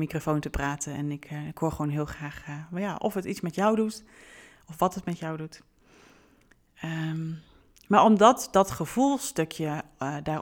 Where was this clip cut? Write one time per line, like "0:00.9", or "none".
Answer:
none